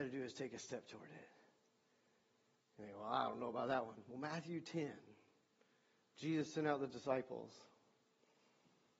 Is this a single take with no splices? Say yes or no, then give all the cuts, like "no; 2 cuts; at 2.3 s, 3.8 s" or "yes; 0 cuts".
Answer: yes; 0 cuts